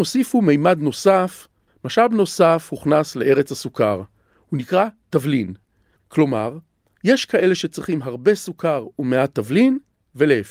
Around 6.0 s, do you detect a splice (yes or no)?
yes